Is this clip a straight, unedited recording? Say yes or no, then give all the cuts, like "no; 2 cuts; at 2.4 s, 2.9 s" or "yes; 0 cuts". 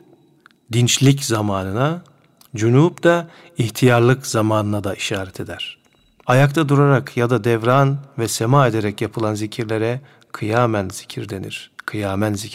no; 1 cut; at 6.2 s